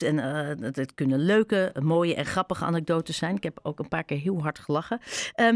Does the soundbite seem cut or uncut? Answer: uncut